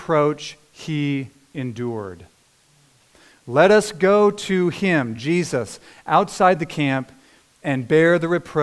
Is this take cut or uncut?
uncut